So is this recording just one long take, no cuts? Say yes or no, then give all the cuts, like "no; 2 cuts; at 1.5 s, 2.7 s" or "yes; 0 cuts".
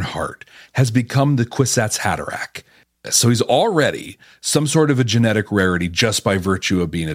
yes; 0 cuts